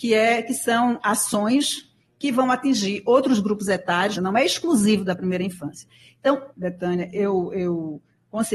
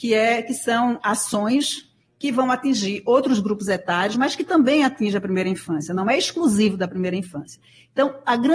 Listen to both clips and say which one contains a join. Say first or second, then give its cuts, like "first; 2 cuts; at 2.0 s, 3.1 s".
first; 2 cuts; at 4.1 s, 6.5 s